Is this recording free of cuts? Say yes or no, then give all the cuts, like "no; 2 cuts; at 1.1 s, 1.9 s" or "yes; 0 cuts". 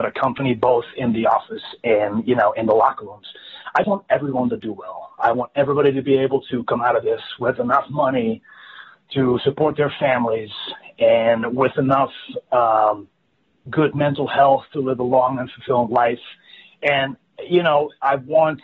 no; 1 cut; at 3.8 s